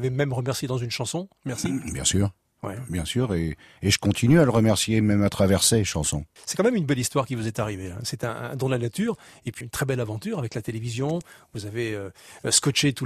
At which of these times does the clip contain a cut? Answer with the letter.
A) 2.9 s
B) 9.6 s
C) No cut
B